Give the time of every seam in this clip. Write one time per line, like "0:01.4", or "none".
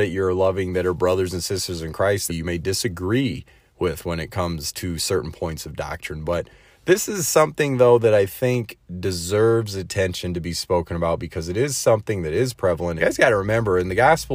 0:02.3
0:13.0